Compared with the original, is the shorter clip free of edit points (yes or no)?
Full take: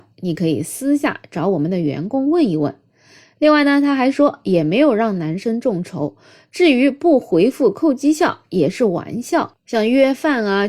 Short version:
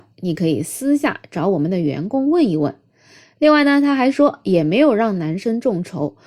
yes